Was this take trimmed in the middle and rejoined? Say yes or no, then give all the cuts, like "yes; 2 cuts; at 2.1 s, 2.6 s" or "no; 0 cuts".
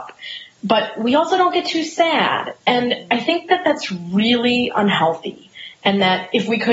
no; 0 cuts